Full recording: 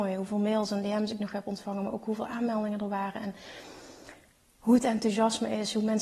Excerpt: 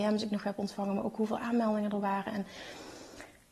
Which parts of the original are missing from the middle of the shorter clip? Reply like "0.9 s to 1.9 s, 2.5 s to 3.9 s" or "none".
none